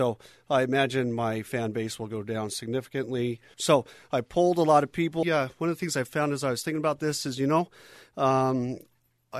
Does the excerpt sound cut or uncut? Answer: cut